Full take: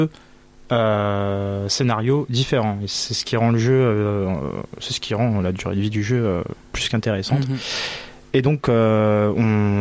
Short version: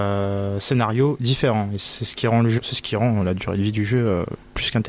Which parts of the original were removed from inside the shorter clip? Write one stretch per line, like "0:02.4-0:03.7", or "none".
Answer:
0:03.7-0:04.8